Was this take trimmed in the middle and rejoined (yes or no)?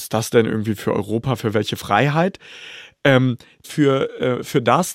yes